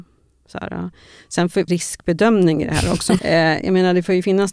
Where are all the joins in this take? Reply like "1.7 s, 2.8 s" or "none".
1.7 s, 3.2 s

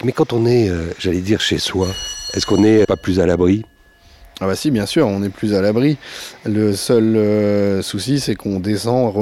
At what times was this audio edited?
2.8 s

